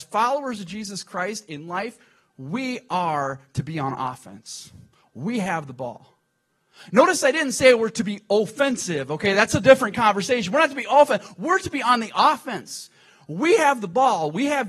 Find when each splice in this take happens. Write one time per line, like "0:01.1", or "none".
none